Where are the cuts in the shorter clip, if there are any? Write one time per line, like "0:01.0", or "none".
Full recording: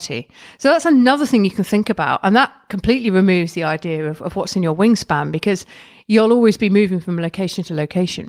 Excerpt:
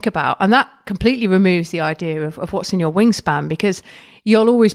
none